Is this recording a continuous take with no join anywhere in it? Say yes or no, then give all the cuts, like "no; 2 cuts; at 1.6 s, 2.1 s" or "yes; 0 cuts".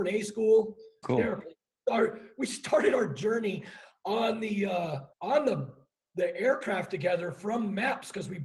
no; 2 cuts; at 1.0 s, 5.1 s